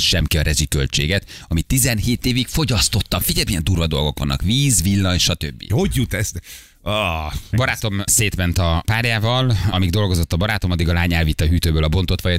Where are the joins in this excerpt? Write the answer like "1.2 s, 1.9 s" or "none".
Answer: none